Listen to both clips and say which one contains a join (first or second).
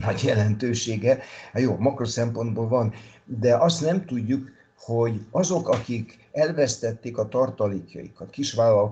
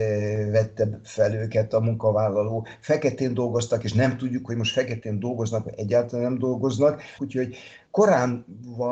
second